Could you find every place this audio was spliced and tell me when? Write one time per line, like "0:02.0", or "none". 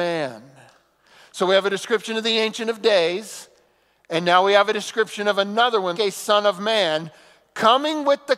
0:05.9